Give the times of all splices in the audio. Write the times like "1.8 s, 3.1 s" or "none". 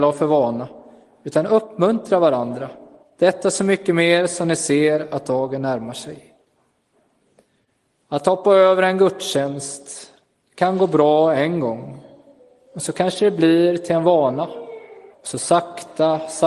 15.1 s